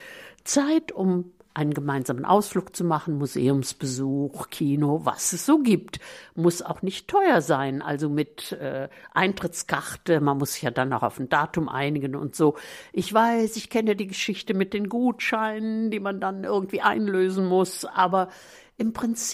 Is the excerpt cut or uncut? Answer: uncut